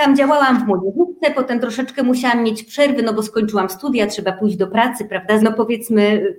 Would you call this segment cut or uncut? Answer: cut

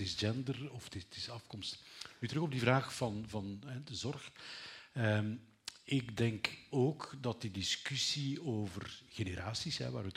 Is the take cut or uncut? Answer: uncut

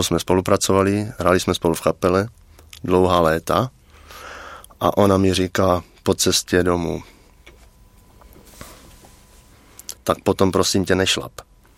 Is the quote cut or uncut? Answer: cut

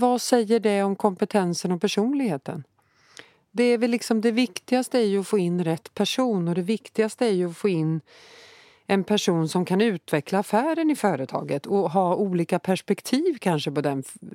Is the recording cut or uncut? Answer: uncut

